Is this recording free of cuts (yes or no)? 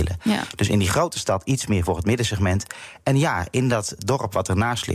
yes